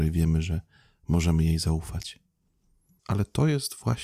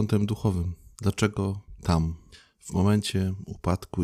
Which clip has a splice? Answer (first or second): first